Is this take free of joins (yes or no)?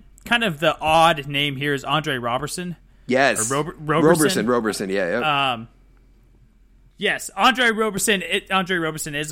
yes